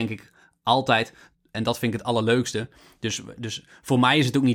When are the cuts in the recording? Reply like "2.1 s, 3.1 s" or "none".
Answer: 1.5 s